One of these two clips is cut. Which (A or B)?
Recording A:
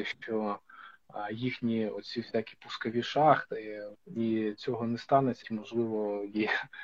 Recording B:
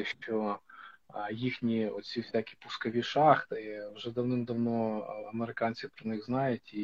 A